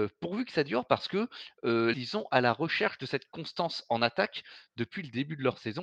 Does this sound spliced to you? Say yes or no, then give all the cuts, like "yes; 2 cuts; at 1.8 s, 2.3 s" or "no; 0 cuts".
yes; 1 cut; at 1.9 s